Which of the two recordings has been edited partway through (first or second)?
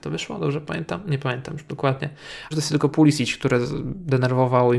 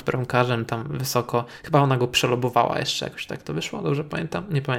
first